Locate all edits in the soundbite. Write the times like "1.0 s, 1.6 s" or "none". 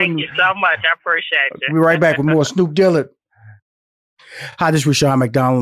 none